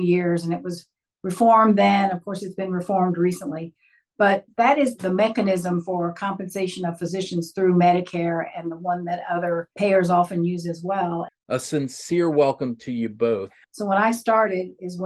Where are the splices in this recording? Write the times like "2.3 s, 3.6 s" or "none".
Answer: 11.3 s, 13.6 s